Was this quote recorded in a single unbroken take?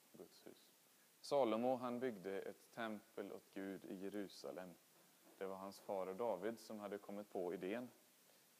no; 1 cut; at 1.2 s

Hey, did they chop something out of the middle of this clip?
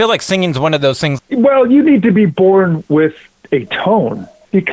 yes; 1 cut; at 1.2 s

